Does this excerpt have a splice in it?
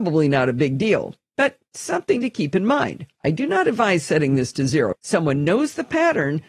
yes; 2 cuts; at 3.2 s, 4.9 s

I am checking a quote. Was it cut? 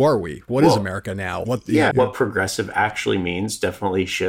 yes; 1 cut; at 1.9 s

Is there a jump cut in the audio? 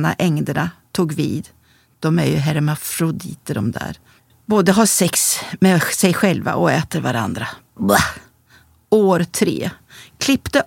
no; 0 cuts

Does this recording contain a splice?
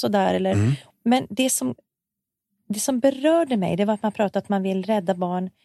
yes; 1 cut; at 0.9 s

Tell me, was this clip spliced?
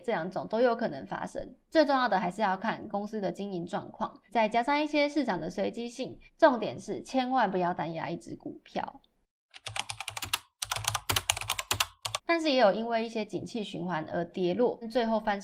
yes; 1 cut; at 12.2 s

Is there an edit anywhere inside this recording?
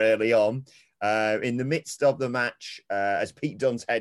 no; 0 cuts

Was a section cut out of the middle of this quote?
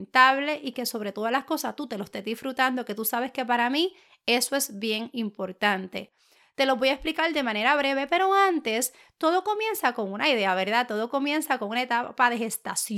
no; 0 cuts

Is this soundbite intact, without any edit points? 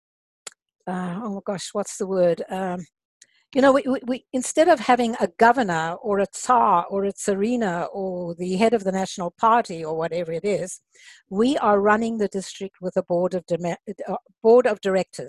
yes; 0 cuts

